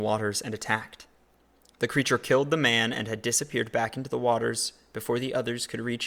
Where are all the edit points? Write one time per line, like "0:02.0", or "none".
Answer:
none